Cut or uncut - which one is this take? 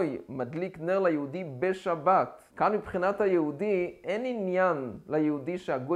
cut